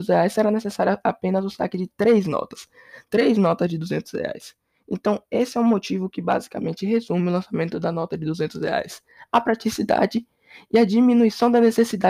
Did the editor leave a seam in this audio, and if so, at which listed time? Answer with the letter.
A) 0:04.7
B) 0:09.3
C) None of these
C